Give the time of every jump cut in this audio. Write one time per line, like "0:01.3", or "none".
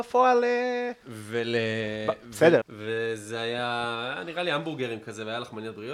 0:01.0
0:02.6